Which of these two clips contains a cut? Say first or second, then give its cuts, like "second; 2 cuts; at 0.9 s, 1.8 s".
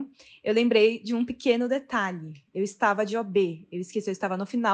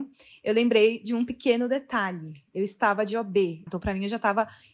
second; 1 cut; at 3.7 s